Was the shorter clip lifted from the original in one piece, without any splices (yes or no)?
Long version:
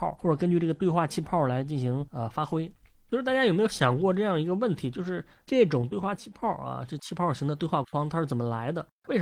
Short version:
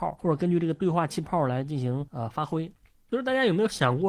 yes